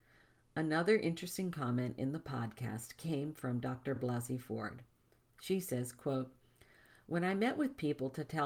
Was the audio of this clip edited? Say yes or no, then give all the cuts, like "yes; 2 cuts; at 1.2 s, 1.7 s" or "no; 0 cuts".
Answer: no; 0 cuts